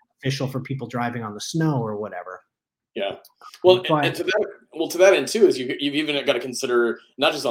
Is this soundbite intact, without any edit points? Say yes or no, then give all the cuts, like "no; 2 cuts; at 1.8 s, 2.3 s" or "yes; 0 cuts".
yes; 0 cuts